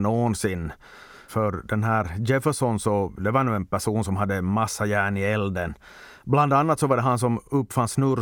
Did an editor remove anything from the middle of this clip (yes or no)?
yes